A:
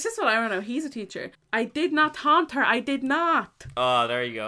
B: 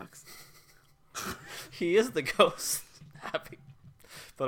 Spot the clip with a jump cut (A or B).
A